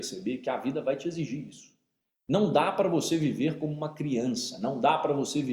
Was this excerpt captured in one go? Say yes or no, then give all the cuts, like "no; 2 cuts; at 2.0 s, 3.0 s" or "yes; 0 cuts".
yes; 0 cuts